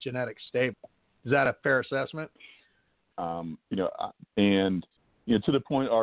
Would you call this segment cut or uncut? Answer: cut